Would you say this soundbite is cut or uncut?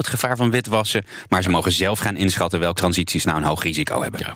cut